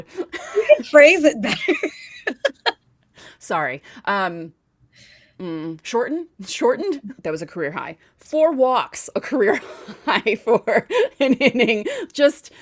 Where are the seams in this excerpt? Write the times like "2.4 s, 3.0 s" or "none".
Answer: 7.2 s, 9.1 s